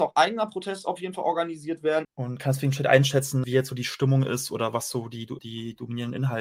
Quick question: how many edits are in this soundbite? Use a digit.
3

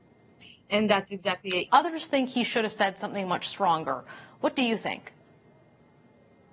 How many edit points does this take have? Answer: 1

